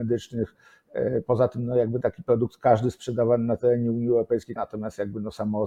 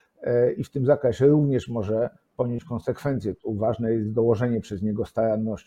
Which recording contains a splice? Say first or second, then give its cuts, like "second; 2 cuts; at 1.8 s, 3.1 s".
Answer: first; 1 cut; at 4.6 s